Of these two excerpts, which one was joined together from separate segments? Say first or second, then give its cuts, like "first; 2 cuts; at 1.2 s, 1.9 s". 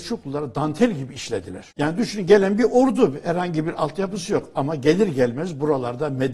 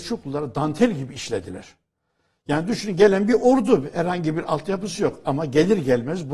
first; 1 cut; at 1.7 s